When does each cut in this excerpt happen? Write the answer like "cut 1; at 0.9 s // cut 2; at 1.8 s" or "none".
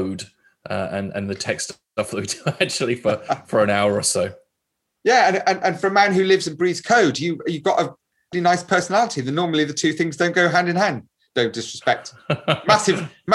cut 1; at 8.3 s